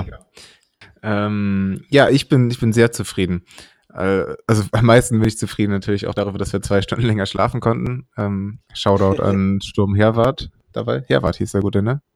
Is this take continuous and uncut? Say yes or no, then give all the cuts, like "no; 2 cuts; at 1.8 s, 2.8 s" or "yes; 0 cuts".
yes; 0 cuts